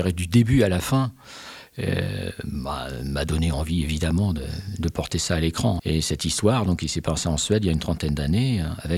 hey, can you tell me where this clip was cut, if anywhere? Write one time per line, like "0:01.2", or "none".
0:05.8

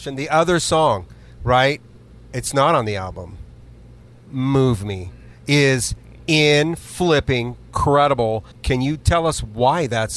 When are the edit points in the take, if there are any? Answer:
0:08.5

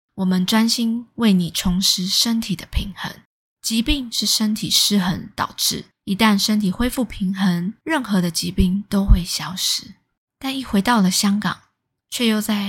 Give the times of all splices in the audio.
0:10.3

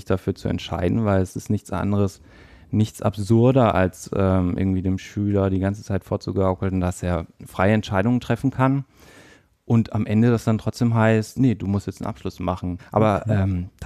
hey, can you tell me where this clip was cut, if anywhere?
0:11.3
0:12.8

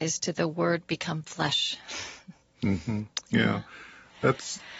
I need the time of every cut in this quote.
none

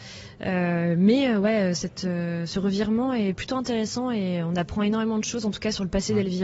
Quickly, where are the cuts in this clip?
none

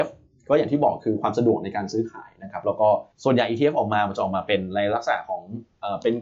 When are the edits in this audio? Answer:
0:03.1

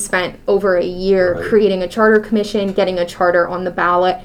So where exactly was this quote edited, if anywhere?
none

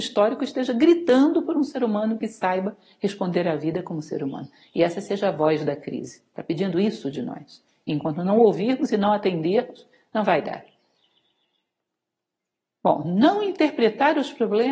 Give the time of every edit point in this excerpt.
none

